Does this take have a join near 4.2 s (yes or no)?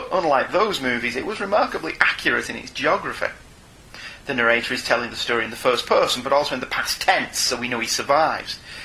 yes